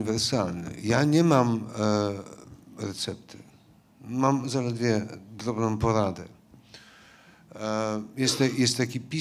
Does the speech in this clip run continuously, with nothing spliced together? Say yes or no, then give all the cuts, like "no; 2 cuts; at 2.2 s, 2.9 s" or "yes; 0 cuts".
yes; 0 cuts